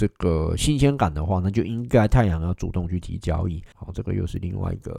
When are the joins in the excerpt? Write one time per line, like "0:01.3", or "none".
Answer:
0:03.7